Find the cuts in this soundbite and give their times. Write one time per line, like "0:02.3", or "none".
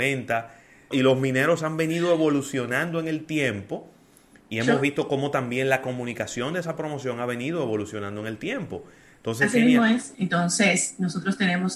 0:00.9
0:10.1